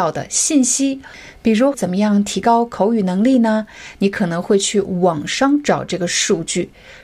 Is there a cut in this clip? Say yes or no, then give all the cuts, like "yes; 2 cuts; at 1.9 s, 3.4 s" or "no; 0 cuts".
yes; 2 cuts; at 1.7 s, 3.9 s